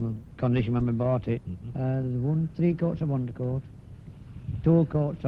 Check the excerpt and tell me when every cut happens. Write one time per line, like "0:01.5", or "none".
0:01.4
0:02.5

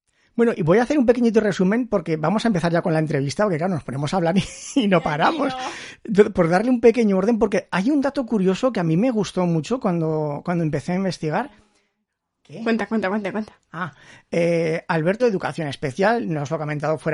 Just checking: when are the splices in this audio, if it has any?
0:15.2

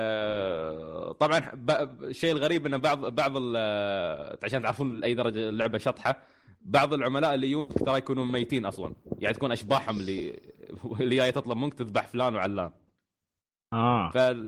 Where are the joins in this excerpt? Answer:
none

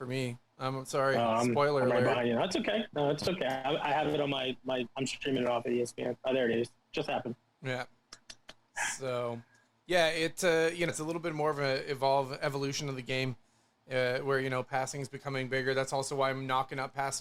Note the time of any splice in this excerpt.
0:10.9

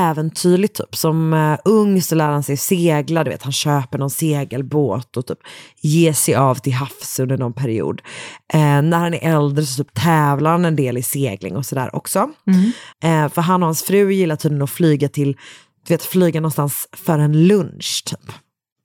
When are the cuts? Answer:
0:12.9

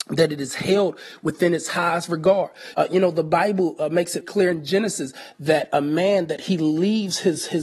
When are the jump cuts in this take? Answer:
0:02.7
0:04.2

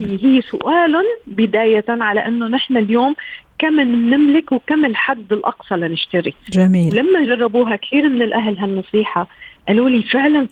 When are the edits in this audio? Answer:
none

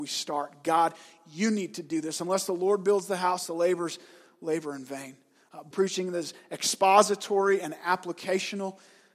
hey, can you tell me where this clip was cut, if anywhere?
0:05.7

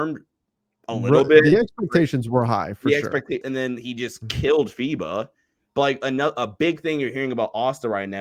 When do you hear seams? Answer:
0:03.4

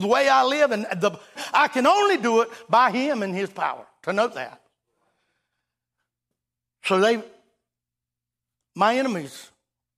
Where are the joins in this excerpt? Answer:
0:01.4

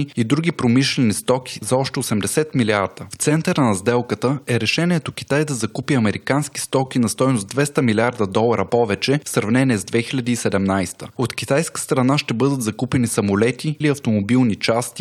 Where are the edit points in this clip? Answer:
0:03.1
0:13.8

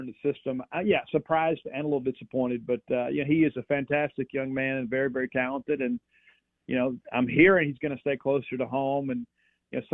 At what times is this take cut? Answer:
none

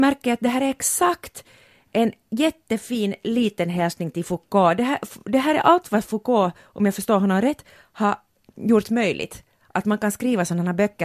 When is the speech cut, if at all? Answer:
none

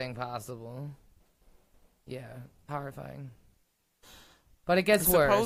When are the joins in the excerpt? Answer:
none

